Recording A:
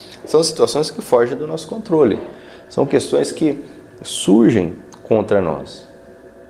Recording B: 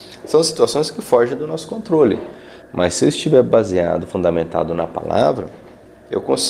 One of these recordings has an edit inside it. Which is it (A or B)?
B